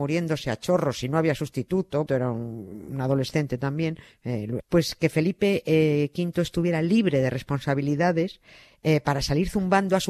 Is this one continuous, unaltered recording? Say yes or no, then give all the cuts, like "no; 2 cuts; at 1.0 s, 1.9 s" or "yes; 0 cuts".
no; 2 cuts; at 2.1 s, 4.6 s